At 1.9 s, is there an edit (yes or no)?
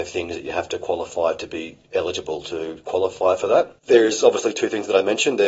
no